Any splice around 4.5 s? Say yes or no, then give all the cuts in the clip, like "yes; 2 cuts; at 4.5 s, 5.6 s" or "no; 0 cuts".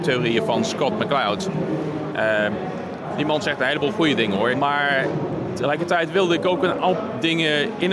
yes; 1 cut; at 4.5 s